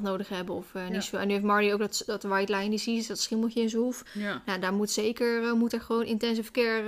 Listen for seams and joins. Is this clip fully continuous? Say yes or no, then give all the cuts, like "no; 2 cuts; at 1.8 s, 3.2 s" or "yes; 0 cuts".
yes; 0 cuts